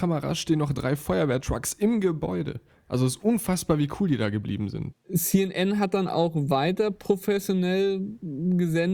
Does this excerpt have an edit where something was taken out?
yes; 1 cut; at 4.9 s

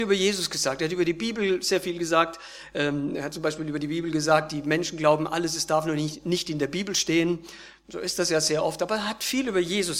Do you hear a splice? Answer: no; 0 cuts

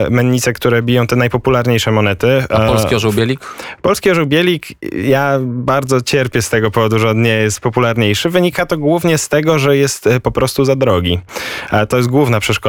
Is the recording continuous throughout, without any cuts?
yes; 0 cuts

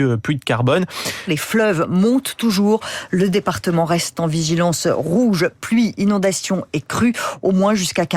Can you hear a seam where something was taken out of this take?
yes; 1 cut; at 1.3 s

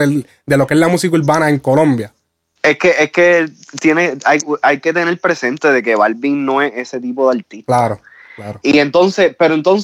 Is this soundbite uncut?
yes; 0 cuts

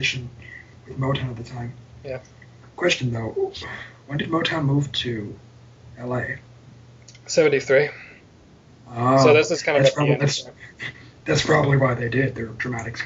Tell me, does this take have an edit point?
no; 0 cuts

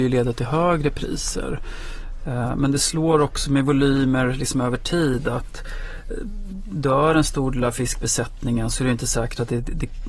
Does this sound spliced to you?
no; 0 cuts

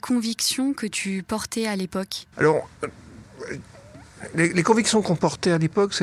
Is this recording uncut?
no; 1 cut; at 2.3 s

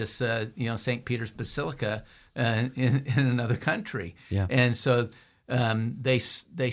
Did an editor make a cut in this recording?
no; 0 cuts

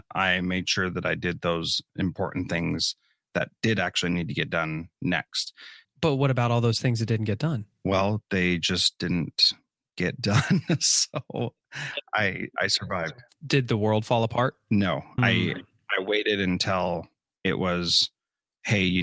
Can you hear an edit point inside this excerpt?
yes; 2 cuts; at 5.8 s, 15.2 s

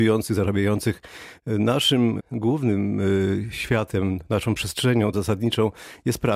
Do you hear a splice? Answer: yes; 2 cuts; at 2.2 s, 5.1 s

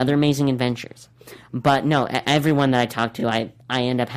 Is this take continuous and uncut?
yes; 0 cuts

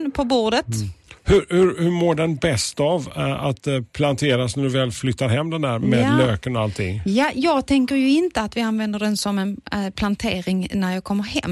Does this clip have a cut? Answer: no; 0 cuts

